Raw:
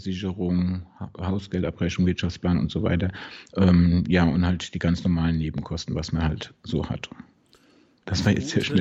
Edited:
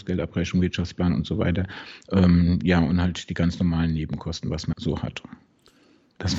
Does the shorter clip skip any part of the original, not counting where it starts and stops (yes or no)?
yes